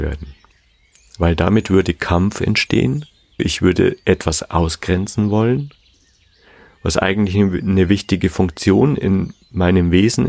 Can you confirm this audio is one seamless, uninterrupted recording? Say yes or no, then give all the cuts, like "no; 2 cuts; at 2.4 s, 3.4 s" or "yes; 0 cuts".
no; 1 cut; at 3.4 s